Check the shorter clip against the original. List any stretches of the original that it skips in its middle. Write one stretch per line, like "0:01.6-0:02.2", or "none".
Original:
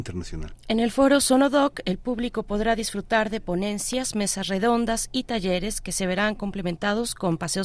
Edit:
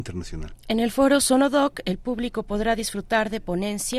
none